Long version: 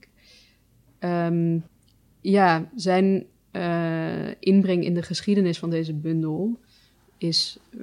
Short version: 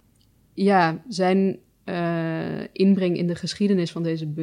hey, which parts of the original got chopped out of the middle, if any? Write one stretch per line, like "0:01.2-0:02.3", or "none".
none